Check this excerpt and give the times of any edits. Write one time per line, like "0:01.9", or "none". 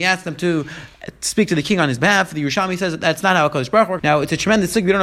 0:04.0